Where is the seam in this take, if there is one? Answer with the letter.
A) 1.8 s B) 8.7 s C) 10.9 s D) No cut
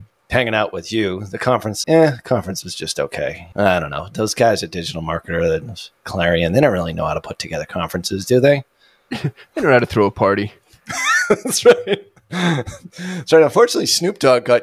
A